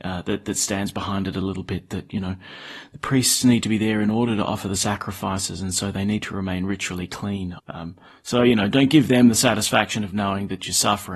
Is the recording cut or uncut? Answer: cut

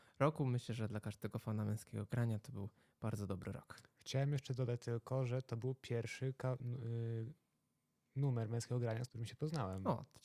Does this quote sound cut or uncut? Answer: cut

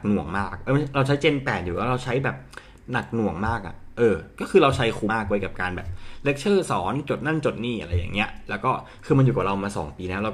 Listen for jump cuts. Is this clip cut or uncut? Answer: cut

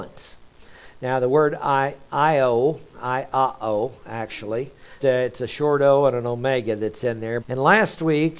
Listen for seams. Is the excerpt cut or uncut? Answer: cut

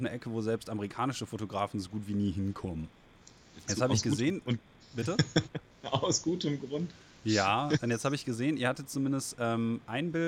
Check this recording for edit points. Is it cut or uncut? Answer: uncut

